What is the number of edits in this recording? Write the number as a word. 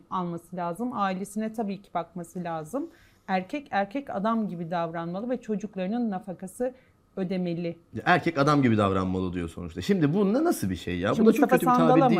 zero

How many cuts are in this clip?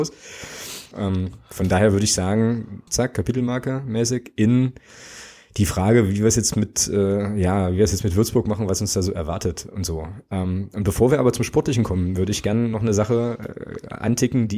two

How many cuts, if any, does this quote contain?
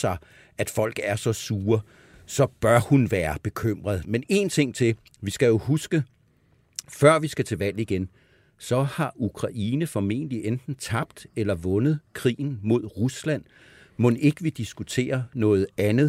one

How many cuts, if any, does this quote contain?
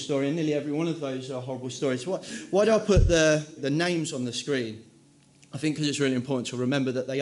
one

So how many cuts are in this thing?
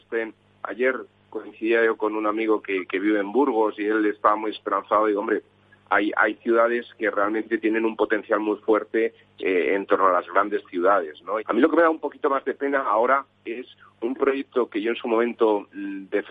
one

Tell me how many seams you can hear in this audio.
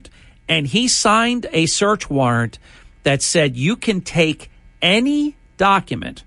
zero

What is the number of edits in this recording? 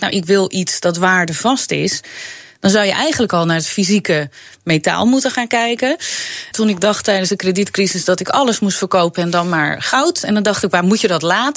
one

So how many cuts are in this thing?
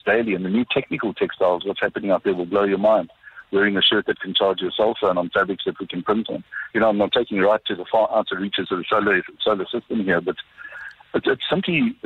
one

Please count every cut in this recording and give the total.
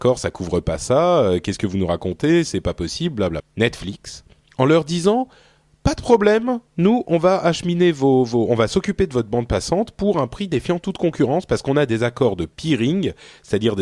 one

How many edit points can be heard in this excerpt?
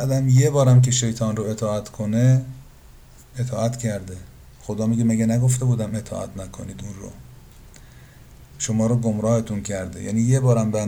zero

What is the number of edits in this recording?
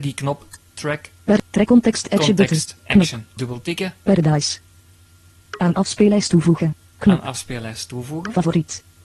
two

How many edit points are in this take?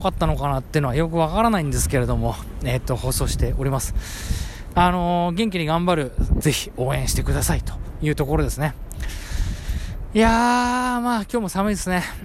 two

